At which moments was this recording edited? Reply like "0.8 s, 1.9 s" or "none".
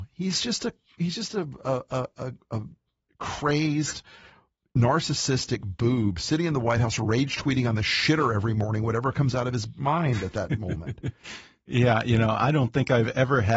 2.1 s